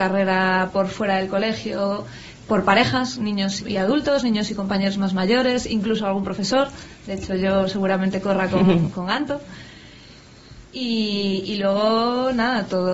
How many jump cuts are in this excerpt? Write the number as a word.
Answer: one